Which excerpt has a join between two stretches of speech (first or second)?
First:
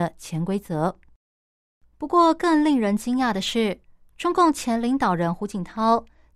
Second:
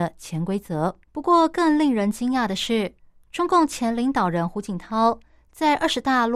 second